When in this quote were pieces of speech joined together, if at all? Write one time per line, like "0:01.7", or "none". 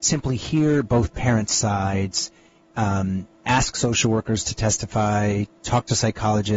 none

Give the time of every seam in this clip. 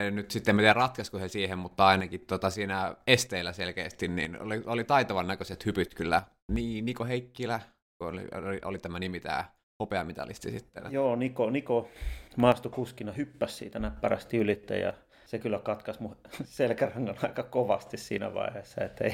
none

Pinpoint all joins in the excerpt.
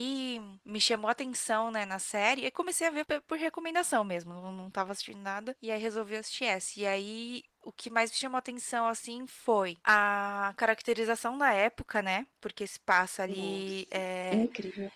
none

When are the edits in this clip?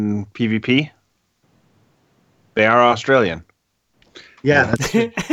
none

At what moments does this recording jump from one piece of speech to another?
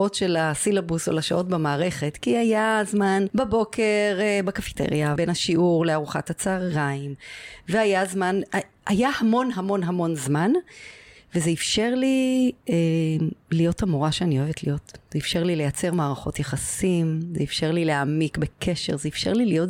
0:05.2

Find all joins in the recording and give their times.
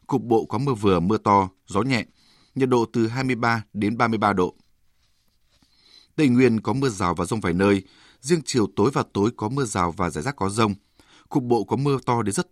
none

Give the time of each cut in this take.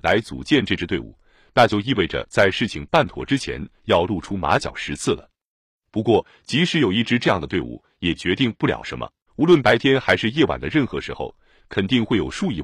0:09.3
0:11.6

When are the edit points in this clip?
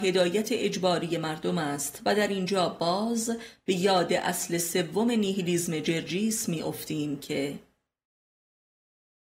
none

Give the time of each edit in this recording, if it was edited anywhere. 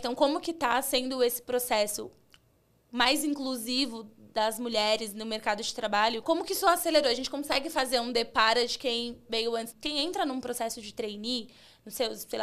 0:06.2
0:09.7

